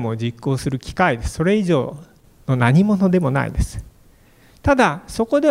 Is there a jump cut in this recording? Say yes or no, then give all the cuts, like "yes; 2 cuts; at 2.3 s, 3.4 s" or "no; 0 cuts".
no; 0 cuts